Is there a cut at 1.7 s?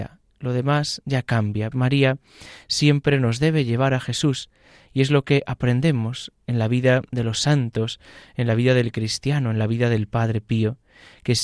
yes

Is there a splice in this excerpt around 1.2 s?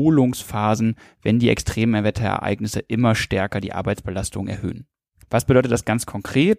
no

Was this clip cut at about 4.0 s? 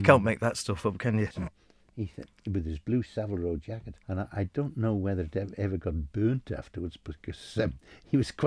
yes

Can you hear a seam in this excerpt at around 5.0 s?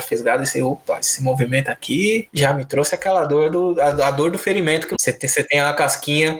yes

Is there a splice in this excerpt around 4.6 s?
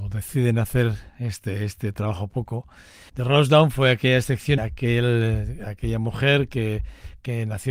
yes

